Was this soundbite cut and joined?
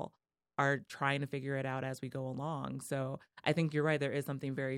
no; 0 cuts

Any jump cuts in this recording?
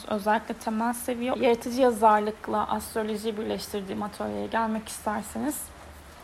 yes; 1 cut; at 1.3 s

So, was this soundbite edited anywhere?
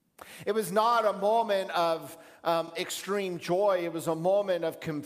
no; 0 cuts

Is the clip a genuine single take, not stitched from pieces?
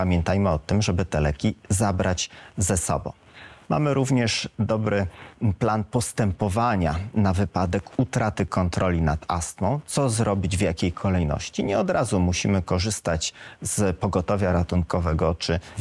yes; 0 cuts

